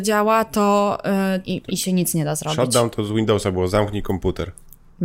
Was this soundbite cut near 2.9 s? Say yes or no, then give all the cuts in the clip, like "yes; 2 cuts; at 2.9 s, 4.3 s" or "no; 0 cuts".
no; 1 cut; at 1.4 s